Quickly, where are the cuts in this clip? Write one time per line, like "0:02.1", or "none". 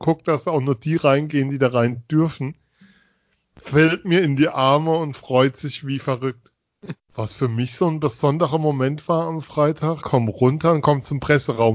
0:07.0
0:10.0